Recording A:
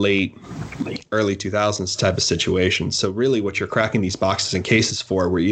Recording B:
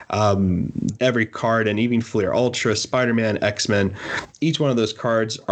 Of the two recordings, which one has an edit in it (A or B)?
B